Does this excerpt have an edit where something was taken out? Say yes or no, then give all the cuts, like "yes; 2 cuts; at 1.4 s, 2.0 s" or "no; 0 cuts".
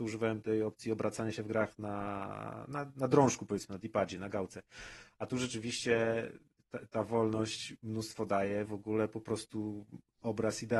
yes; 1 cut; at 8.7 s